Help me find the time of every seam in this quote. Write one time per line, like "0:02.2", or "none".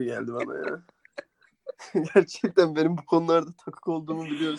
none